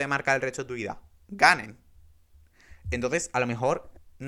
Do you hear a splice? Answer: no; 0 cuts

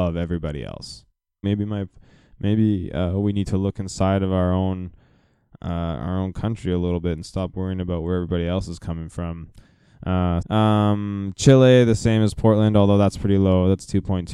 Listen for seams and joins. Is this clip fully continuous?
no; 2 cuts; at 1.4 s, 10.4 s

